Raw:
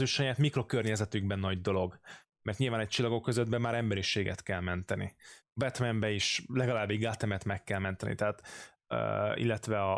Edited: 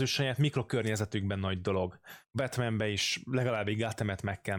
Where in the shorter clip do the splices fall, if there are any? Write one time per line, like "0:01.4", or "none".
0:02.3